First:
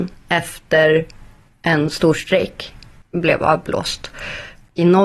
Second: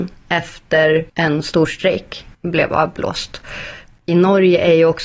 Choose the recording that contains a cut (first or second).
second